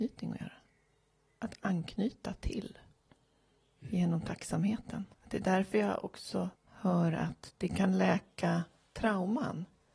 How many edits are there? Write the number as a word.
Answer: two